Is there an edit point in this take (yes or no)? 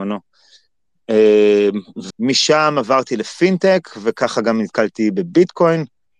yes